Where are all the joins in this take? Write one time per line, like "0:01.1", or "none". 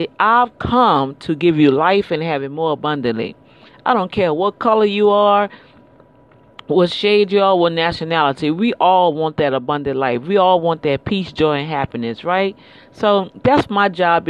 none